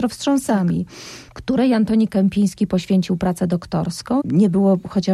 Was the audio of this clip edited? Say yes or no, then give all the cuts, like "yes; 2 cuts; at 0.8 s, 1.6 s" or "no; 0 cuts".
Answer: yes; 1 cut; at 4.2 s